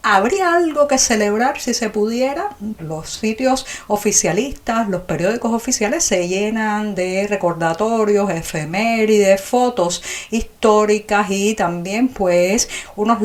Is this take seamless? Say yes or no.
no